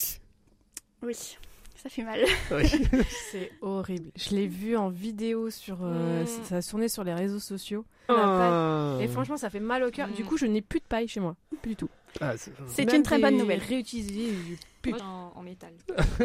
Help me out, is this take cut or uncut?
cut